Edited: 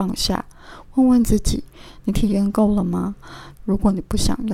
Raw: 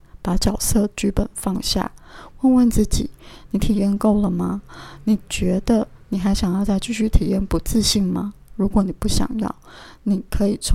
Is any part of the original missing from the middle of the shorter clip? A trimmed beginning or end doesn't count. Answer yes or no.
yes